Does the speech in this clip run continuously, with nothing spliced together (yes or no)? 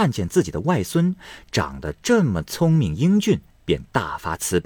no